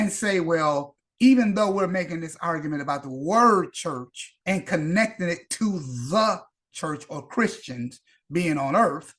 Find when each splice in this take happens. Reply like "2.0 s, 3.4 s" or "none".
4.4 s